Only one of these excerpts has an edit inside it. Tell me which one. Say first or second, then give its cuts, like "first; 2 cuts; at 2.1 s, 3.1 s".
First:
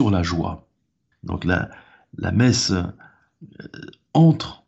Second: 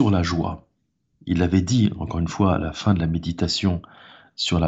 first; 1 cut; at 1.1 s